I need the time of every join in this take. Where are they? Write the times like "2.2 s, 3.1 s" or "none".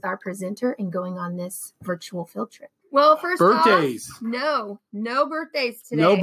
2.8 s